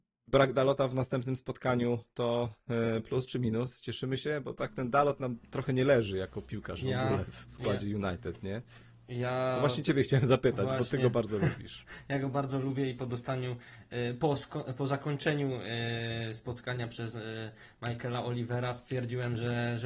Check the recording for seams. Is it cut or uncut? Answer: uncut